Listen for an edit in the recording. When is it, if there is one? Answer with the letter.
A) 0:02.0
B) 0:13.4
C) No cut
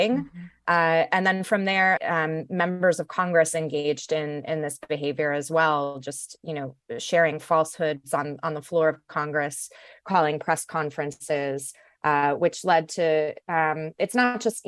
A